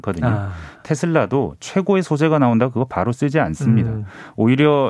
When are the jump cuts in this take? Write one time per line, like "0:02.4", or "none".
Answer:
none